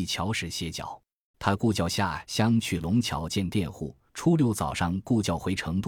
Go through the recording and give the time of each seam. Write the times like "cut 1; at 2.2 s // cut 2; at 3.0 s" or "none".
cut 1; at 1.3 s // cut 2; at 4.1 s